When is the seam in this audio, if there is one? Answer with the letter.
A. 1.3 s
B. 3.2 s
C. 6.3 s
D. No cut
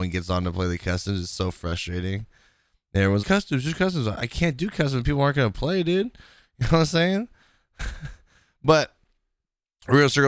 B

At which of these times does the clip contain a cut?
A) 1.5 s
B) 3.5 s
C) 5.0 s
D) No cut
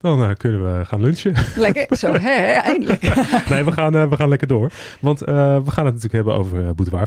B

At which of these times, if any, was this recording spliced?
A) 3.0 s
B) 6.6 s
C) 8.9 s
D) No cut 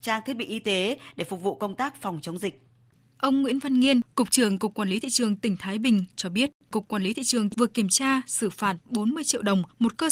A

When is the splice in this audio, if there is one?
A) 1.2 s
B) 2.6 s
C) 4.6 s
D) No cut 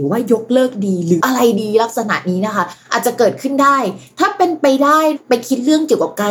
A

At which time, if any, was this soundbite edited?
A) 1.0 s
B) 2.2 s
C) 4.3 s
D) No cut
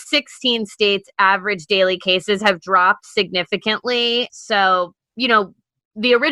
C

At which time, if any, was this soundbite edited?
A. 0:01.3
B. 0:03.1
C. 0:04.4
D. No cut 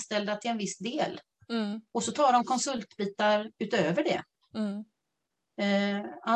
D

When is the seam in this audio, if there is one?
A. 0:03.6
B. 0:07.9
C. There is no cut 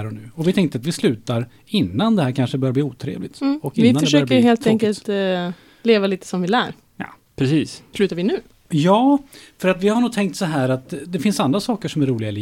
B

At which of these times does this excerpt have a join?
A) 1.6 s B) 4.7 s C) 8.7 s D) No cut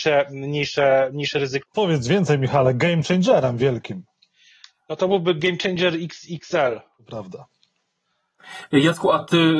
A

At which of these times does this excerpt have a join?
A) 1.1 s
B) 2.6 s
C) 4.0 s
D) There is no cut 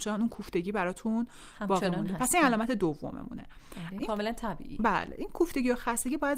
C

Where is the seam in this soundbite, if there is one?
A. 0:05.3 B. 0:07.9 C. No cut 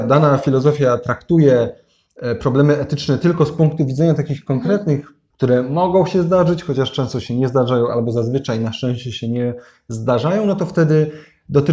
A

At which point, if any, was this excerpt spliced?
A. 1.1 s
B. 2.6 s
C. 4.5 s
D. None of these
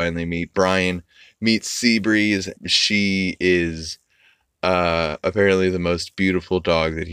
B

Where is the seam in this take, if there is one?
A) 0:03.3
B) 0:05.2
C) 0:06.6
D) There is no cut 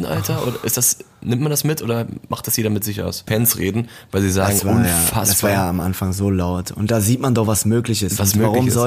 A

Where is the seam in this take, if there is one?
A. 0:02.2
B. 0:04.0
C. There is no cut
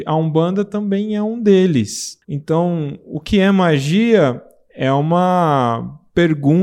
A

